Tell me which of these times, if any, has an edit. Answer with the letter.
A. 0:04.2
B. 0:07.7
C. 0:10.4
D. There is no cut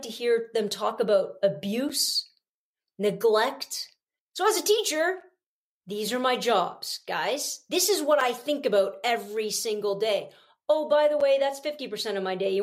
A